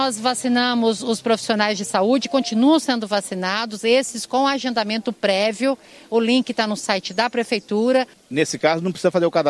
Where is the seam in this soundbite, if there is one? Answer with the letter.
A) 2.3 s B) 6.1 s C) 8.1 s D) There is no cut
C